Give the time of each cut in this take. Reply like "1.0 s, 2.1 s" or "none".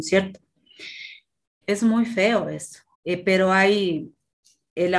1.6 s, 2.9 s